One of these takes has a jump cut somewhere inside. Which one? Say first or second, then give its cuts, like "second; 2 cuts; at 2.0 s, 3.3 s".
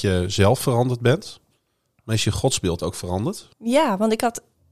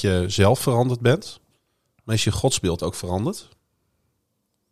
first; 1 cut; at 3.5 s